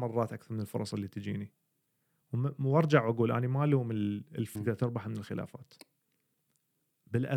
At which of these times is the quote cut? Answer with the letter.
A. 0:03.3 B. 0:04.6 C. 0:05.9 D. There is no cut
B